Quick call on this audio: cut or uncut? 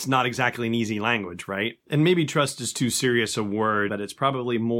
cut